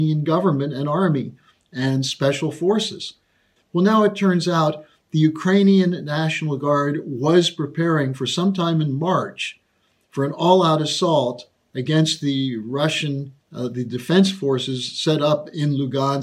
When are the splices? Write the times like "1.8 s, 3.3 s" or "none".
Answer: 3.6 s, 13.4 s